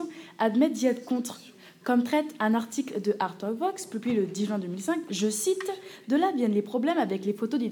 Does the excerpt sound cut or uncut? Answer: uncut